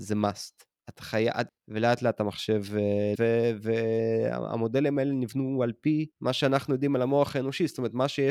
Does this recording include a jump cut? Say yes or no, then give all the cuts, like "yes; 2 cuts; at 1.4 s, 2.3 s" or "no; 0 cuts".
yes; 3 cuts; at 1.5 s, 3.2 s, 6.1 s